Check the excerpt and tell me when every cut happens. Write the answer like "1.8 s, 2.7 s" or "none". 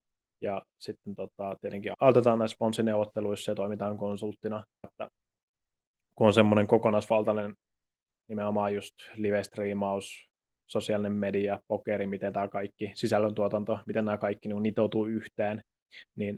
1.9 s, 4.8 s, 8.1 s